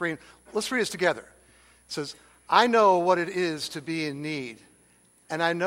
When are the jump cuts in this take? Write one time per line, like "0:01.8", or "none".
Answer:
none